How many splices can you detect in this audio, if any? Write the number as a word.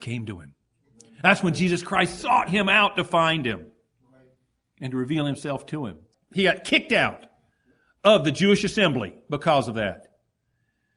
one